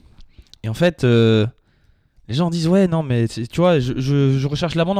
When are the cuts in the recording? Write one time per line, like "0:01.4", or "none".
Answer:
none